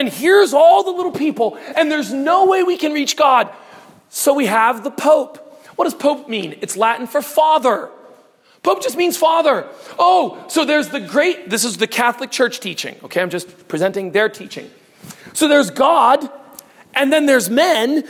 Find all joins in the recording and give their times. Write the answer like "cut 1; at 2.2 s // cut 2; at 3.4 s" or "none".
none